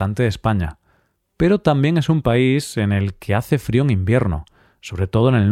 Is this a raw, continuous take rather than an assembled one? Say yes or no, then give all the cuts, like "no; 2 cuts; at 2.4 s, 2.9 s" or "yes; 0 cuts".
yes; 0 cuts